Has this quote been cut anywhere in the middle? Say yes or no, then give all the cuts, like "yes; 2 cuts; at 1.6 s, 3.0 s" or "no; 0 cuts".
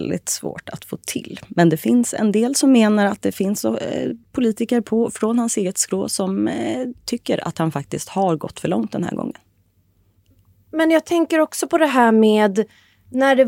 no; 0 cuts